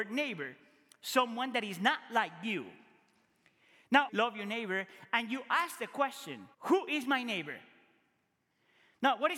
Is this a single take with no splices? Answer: no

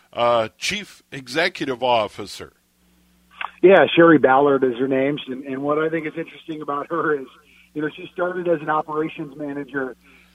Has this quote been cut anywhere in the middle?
yes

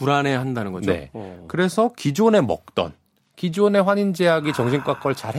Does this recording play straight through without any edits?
yes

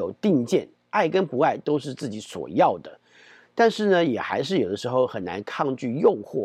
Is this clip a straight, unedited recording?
yes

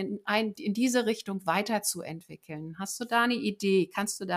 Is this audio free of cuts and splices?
yes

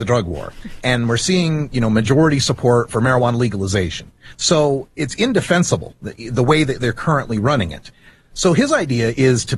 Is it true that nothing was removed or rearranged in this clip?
yes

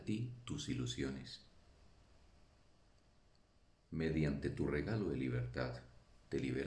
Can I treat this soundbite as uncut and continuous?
yes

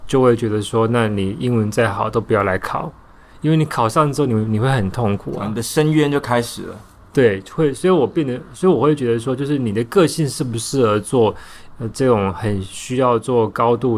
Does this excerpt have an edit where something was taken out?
no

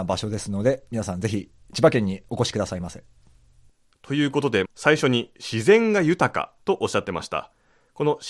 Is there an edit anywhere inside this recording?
yes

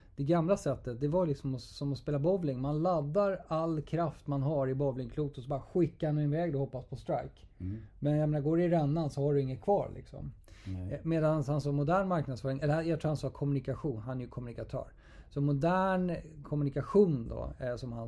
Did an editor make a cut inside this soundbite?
no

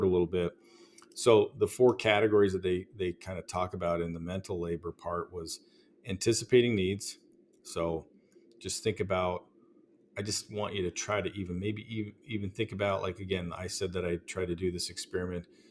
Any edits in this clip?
no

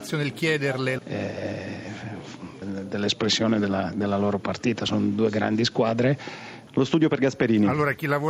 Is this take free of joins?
no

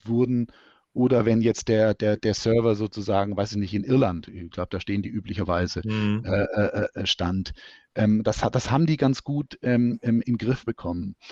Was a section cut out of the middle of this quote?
no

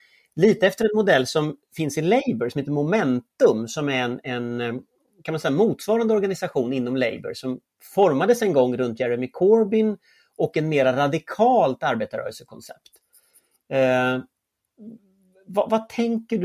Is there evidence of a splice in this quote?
no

